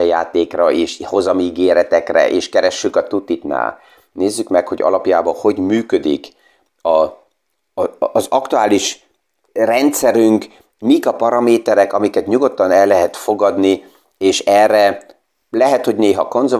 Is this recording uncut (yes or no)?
no